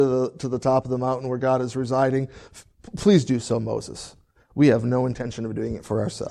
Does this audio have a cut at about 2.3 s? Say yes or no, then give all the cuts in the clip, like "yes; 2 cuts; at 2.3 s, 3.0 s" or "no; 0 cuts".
no; 0 cuts